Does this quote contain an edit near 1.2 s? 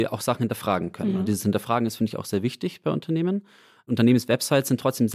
no; 0 cuts

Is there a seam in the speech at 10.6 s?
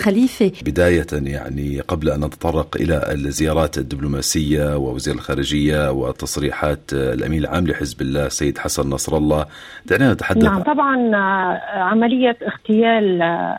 yes; 1 cut; at 10.6 s

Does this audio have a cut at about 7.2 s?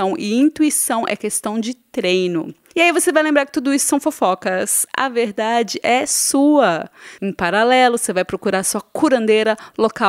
yes; 1 cut; at 7.2 s

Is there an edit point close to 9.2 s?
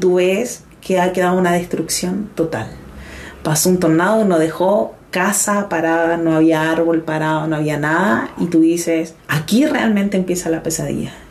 yes; 1 cut; at 9.2 s

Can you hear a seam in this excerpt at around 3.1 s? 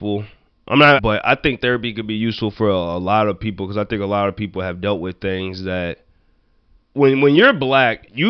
no; 2 cuts; at 1.0 s, 6.8 s

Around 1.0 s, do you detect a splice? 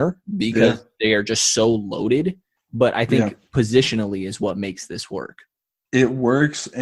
no; 0 cuts

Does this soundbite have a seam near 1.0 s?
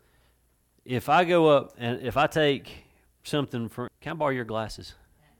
no; 1 cut; at 3.9 s

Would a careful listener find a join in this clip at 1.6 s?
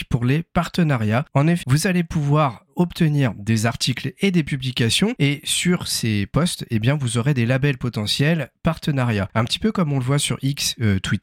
yes; 1 cut; at 1.6 s

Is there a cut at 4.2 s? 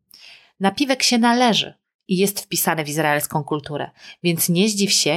no; 0 cuts

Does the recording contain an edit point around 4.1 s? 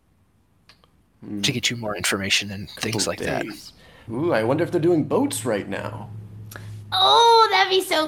yes; 1 cut; at 4.1 s

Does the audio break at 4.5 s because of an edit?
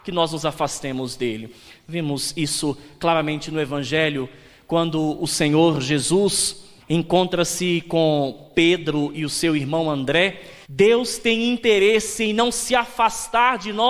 no; 2 cuts; at 6.8 s, 10.6 s

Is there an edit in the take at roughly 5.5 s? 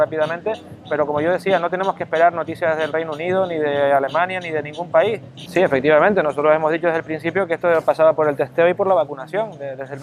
yes; 1 cut; at 5.5 s

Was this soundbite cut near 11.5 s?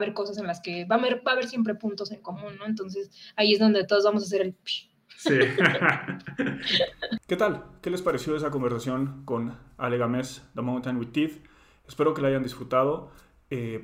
no; 0 cuts

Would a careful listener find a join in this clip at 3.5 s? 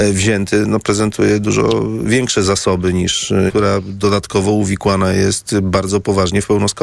yes; 1 cut; at 3.5 s

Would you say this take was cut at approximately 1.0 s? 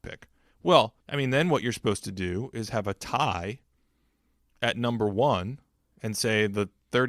yes; 1 cut; at 1.0 s

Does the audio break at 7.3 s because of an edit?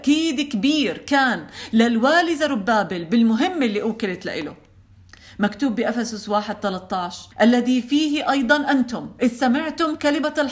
yes; 1 cut; at 7.3 s

